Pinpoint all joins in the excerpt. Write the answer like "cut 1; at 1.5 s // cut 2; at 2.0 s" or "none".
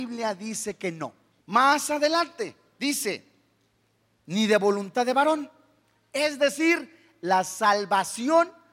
cut 1; at 1.4 s